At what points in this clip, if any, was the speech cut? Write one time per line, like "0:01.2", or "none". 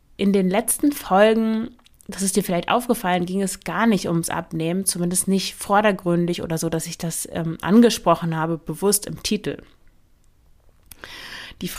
none